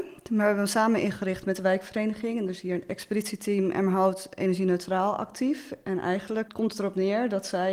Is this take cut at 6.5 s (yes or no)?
yes